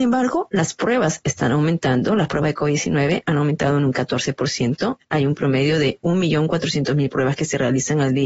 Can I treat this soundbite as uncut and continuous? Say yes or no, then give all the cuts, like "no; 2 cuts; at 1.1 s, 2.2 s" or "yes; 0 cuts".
yes; 0 cuts